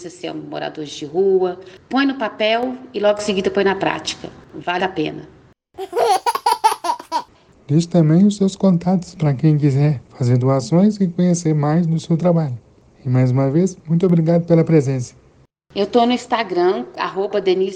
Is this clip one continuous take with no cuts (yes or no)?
no